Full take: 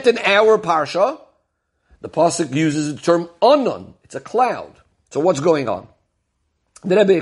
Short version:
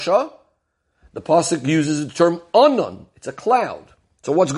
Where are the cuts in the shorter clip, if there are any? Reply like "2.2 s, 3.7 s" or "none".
none